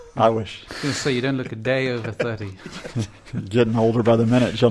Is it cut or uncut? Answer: uncut